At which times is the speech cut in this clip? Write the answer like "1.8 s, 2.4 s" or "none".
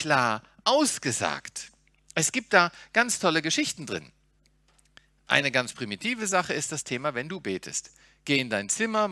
none